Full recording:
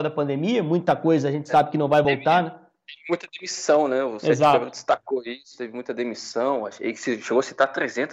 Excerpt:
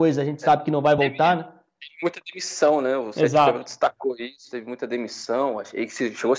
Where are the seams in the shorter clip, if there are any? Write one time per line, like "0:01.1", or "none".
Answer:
none